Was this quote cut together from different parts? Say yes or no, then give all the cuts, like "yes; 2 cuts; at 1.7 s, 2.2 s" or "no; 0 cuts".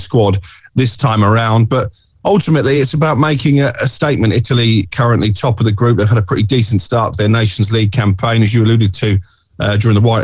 no; 0 cuts